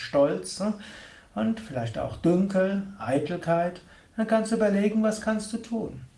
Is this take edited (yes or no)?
no